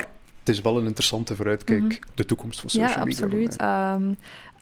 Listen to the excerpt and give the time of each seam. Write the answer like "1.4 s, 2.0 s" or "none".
2.1 s, 3.6 s